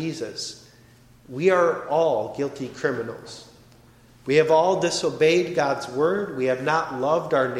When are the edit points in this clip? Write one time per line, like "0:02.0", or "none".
none